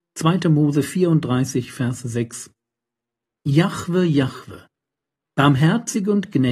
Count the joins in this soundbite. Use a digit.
1